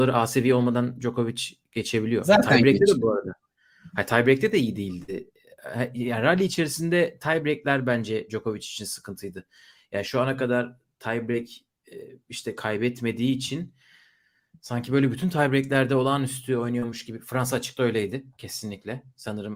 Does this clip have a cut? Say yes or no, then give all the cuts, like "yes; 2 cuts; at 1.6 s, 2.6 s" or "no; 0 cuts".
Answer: no; 0 cuts